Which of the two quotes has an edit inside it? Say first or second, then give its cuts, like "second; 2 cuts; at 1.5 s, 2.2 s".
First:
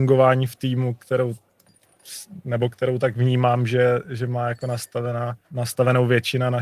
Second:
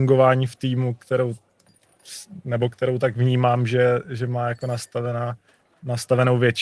first; 1 cut; at 5.4 s